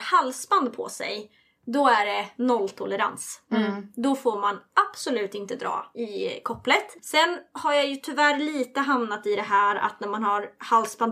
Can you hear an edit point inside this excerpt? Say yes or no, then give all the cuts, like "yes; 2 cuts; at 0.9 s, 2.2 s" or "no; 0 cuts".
yes; 2 cuts; at 5.9 s, 7.0 s